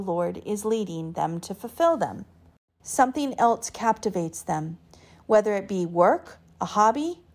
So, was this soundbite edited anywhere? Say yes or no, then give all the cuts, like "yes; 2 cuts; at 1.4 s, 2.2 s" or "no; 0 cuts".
yes; 1 cut; at 2.8 s